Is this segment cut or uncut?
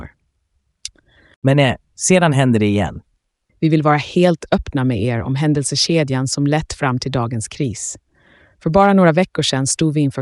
cut